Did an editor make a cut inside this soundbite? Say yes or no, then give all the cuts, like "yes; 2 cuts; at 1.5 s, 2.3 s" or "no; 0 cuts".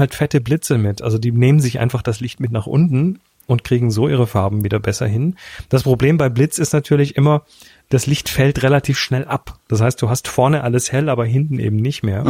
no; 0 cuts